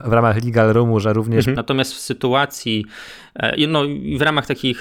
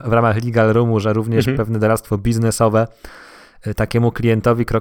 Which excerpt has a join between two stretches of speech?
first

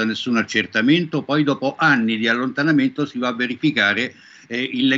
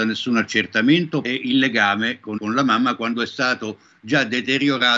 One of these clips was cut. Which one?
second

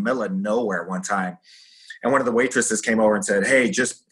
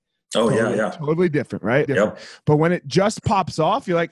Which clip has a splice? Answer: second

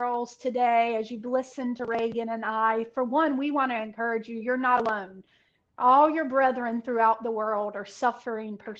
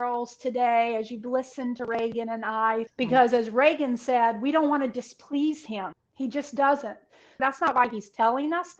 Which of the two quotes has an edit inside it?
second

